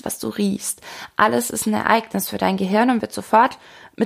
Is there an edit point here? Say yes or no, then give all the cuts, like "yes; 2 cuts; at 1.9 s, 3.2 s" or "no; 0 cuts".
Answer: no; 0 cuts